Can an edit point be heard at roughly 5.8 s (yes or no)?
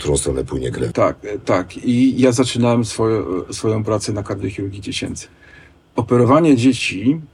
no